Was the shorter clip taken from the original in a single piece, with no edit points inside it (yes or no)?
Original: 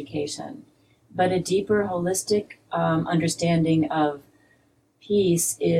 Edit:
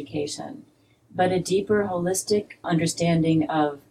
no